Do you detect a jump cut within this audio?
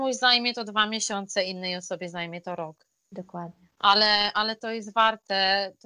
no; 0 cuts

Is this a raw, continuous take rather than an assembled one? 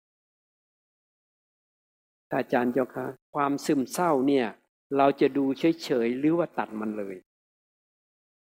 no; 1 cut; at 3.2 s

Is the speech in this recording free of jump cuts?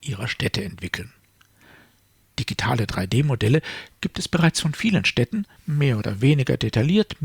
no; 1 cut; at 5.6 s

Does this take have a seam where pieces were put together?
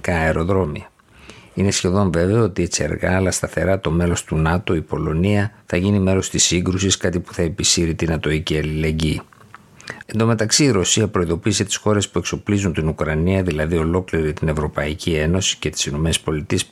yes; 2 cuts; at 5.7 s, 10.0 s

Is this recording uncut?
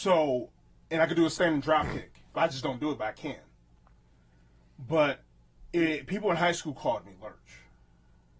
yes; 0 cuts

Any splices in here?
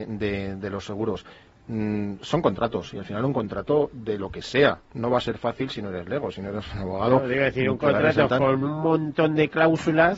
no; 0 cuts

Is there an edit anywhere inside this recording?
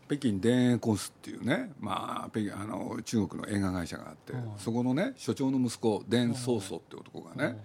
no; 0 cuts

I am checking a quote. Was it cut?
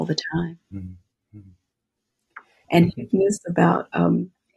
yes; 1 cut; at 2.6 s

